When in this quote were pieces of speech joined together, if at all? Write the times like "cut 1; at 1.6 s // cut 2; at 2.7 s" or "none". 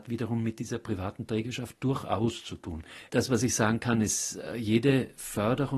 cut 1; at 3.1 s